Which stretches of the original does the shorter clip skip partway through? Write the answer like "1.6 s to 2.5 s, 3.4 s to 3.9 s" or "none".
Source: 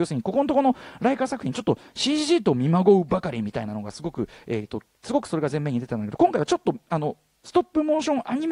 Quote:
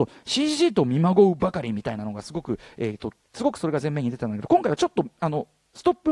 none

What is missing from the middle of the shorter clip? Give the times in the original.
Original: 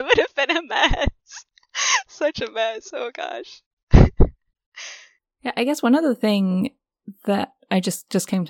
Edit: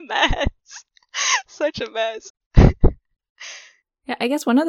2.9 s to 3.7 s

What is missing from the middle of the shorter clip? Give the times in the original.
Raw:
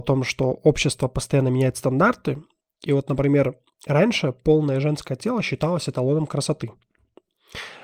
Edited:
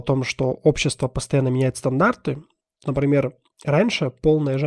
2.8 s to 3.1 s

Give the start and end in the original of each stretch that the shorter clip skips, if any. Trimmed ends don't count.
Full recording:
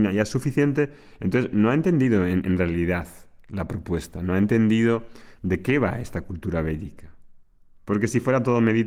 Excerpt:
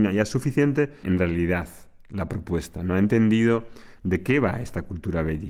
1.0 s to 2.4 s

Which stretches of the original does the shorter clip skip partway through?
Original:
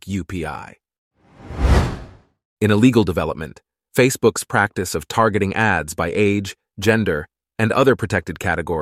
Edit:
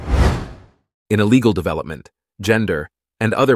3.8 s to 6.7 s

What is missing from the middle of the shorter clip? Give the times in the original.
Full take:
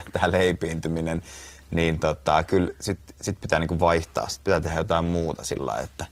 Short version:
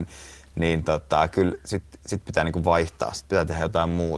none

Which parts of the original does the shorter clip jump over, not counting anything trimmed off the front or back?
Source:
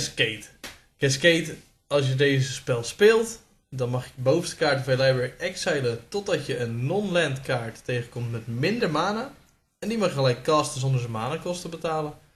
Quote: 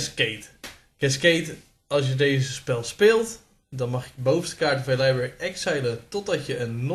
none

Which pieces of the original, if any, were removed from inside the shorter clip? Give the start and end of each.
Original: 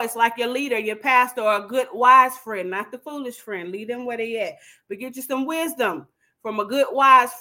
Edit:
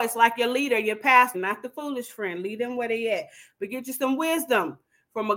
1.3 s to 2.6 s

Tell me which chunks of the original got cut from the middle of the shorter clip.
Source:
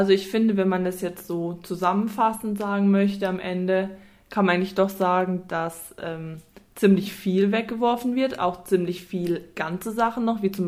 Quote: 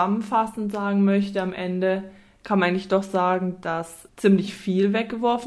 5.9 s to 6.7 s

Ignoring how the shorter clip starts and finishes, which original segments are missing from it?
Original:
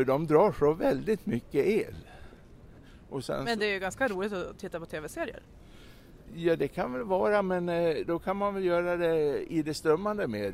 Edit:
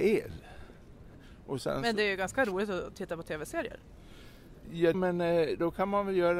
6.6 s to 7.4 s

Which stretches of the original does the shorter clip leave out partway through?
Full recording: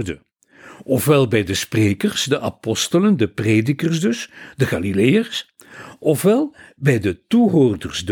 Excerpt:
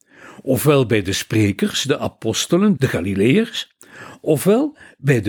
3.2 s to 4.5 s

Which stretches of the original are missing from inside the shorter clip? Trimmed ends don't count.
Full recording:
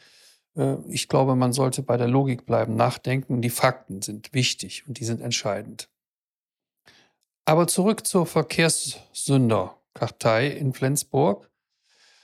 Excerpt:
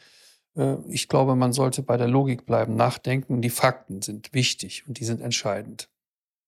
none

